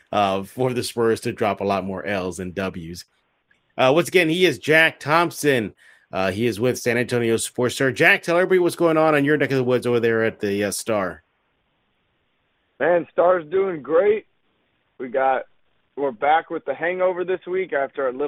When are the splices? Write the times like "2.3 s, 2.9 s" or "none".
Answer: none